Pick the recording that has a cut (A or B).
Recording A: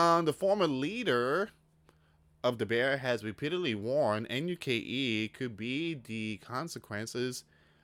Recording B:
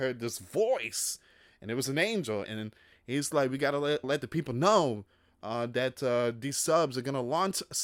B